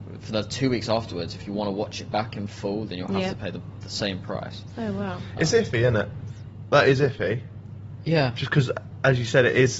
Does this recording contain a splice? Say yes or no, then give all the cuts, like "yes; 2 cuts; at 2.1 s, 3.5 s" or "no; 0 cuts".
no; 0 cuts